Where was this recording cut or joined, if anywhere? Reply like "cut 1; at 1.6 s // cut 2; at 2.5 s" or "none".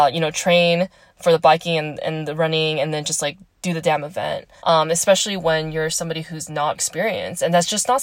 cut 1; at 4.6 s // cut 2; at 6.7 s